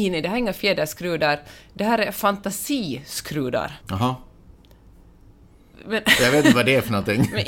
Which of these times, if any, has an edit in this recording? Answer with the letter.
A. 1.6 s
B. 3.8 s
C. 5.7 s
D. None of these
B